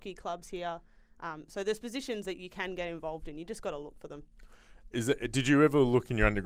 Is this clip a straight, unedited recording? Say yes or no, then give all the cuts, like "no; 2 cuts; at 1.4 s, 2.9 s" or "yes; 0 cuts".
yes; 0 cuts